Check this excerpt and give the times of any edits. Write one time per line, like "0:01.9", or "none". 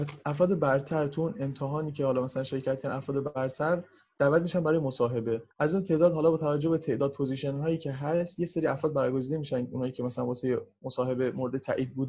0:05.5